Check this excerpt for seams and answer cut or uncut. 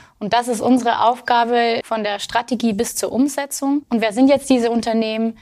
cut